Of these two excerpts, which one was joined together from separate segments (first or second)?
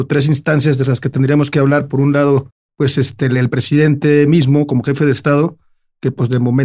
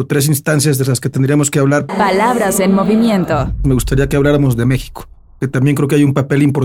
second